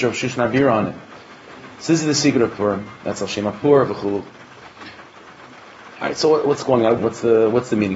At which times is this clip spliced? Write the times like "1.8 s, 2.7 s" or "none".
7.0 s